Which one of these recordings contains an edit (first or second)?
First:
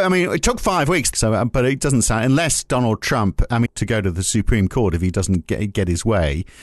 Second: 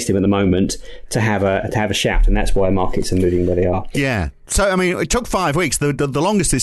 first